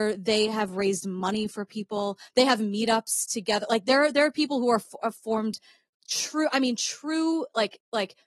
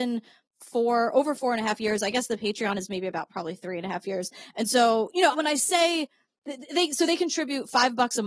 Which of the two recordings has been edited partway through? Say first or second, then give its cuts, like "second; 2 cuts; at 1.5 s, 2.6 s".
second; 1 cut; at 5.3 s